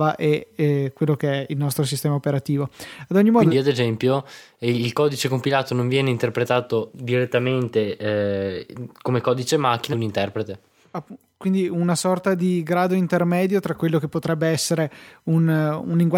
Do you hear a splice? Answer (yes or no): yes